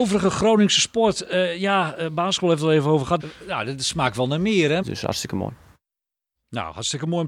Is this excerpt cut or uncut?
cut